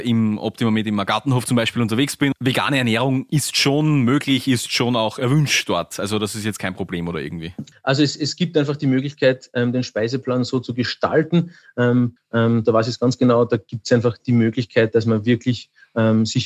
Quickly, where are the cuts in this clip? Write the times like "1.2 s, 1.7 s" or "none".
7.7 s, 12.2 s